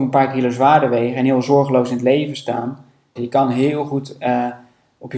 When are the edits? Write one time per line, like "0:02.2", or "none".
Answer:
0:03.2